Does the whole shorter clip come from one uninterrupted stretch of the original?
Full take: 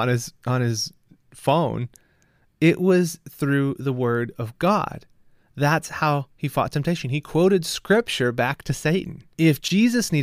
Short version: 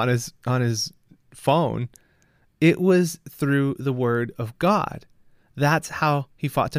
yes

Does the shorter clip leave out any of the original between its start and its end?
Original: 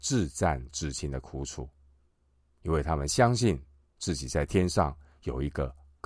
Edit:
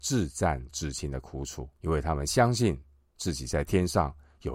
yes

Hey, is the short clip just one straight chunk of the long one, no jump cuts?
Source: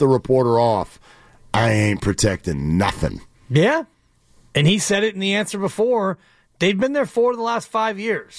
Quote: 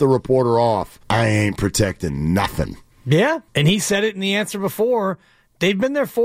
no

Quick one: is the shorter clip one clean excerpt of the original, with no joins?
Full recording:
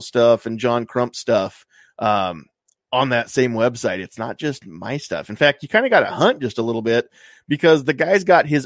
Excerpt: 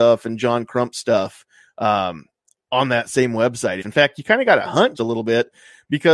no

